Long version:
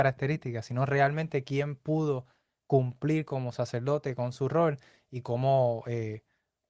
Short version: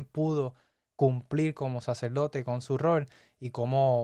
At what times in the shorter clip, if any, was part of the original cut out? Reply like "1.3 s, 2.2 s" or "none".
none